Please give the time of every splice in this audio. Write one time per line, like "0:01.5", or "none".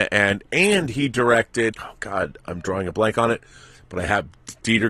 0:01.7